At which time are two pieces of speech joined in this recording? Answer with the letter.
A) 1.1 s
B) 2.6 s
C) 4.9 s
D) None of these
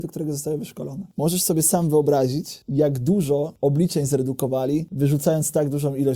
A